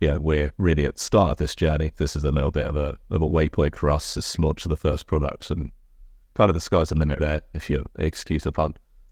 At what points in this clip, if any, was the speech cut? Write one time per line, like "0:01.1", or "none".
0:07.2